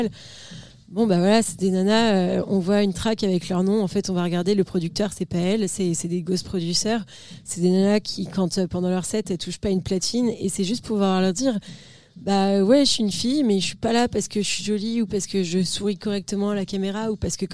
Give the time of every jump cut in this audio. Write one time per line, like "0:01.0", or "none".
none